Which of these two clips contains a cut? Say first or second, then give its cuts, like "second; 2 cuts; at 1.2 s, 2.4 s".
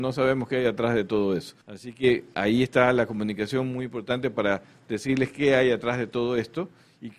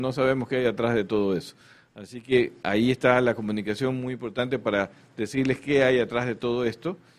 first; 1 cut; at 1.6 s